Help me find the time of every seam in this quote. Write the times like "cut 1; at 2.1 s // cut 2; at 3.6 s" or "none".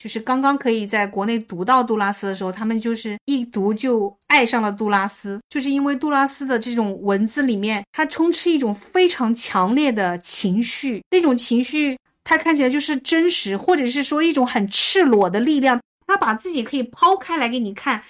none